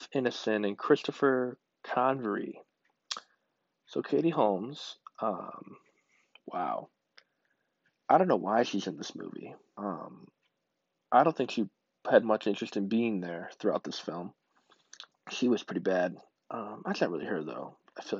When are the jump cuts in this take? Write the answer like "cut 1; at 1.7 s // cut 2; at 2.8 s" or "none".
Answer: cut 1; at 9.8 s // cut 2; at 15.1 s